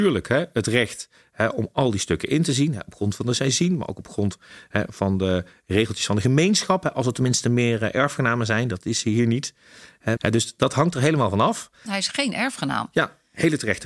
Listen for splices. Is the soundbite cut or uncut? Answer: cut